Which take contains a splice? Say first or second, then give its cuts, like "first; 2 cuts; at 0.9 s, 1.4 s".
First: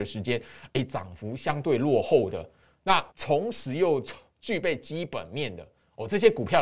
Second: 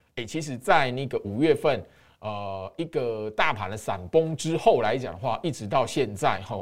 first; 1 cut; at 3.1 s